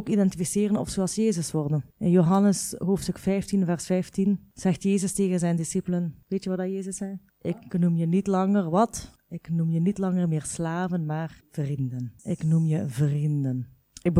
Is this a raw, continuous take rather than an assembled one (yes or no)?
yes